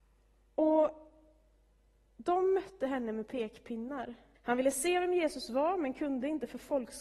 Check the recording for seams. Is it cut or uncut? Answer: cut